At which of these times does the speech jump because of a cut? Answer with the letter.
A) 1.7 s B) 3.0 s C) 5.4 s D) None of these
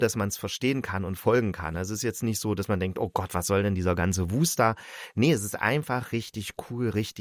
D